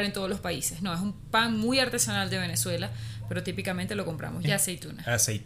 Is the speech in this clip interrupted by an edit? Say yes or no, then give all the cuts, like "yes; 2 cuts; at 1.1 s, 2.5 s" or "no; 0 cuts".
yes; 1 cut; at 4.4 s